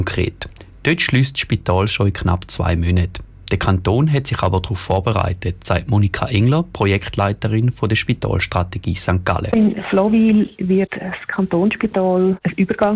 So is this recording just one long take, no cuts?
yes; 0 cuts

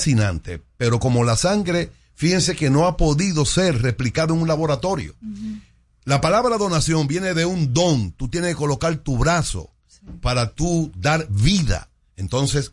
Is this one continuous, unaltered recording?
yes; 0 cuts

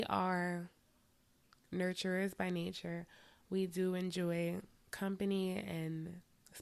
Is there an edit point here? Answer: no; 0 cuts

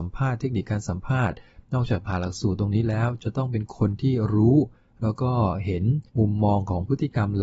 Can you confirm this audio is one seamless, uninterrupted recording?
no; 1 cut; at 6.1 s

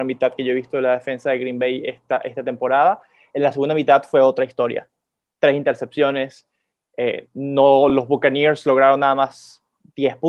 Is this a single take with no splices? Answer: yes; 0 cuts

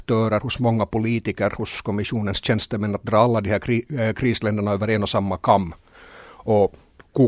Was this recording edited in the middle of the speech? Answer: no; 0 cuts

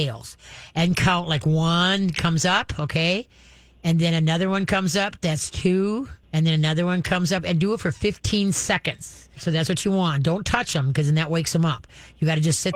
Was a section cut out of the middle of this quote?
yes; 2 cuts; at 6.2 s, 9.3 s

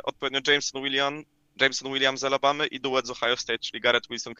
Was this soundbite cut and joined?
no; 0 cuts

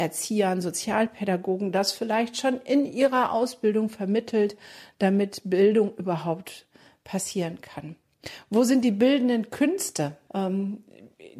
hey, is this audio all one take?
no; 2 cuts; at 4.9 s, 10.3 s

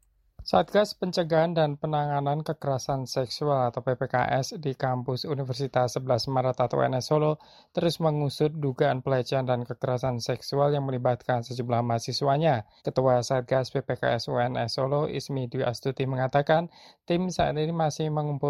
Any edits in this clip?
yes; 1 cut; at 12.8 s

